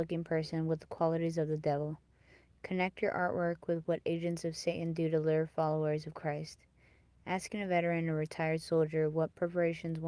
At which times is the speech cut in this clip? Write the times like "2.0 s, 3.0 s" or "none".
none